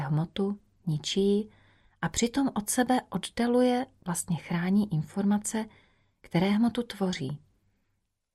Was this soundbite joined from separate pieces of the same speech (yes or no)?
no